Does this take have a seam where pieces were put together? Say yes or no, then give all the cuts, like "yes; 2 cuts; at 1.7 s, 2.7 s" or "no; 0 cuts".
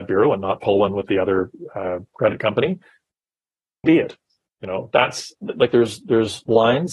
yes; 1 cut; at 3.8 s